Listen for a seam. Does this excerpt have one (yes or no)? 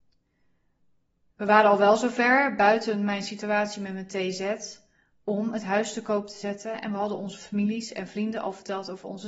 yes